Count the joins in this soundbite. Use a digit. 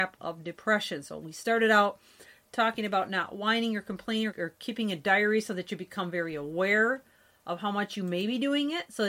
1